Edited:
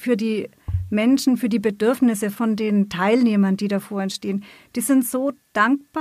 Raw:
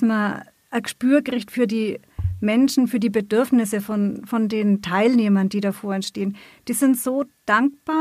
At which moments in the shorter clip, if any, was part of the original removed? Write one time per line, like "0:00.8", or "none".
0:02.3